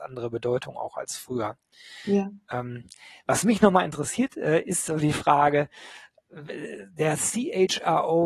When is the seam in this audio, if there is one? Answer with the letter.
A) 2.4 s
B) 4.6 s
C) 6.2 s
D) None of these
D